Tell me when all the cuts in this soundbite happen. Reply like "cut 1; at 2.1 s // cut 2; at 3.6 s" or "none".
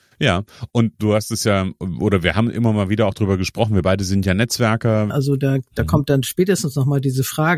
cut 1; at 5.1 s